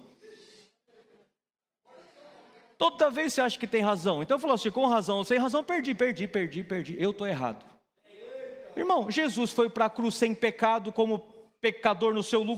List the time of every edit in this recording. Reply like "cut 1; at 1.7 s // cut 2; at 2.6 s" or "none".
none